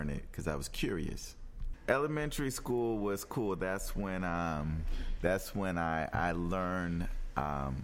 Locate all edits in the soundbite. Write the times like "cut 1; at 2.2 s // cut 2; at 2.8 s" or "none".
cut 1; at 1.7 s